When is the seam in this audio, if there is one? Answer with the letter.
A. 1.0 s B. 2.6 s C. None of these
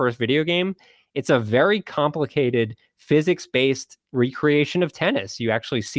C